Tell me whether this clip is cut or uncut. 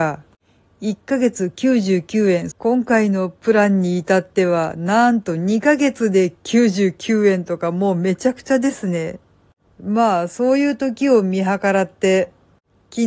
cut